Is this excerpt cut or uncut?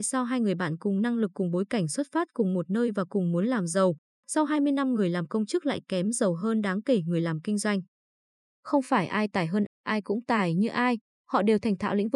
cut